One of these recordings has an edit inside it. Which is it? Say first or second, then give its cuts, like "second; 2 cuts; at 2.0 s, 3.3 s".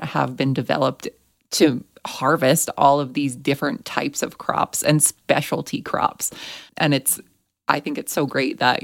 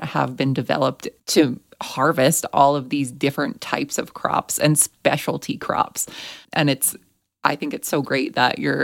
second; 1 cut; at 1.2 s